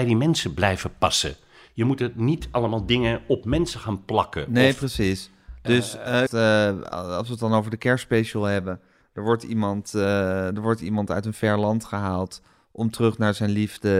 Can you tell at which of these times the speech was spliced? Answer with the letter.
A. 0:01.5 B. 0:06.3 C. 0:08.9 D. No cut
B